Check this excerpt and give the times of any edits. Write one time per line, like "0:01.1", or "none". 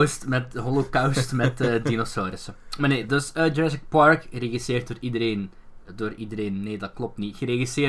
none